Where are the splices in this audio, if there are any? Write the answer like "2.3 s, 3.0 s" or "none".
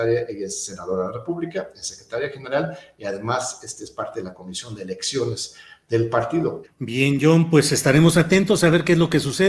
6.6 s